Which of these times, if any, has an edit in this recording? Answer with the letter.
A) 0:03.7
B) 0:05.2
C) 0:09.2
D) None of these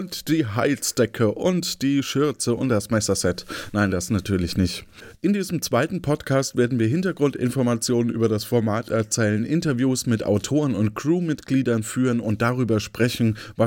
D